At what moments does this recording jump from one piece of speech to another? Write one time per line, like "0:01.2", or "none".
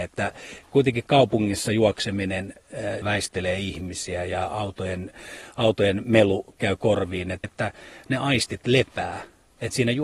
0:03.0
0:07.4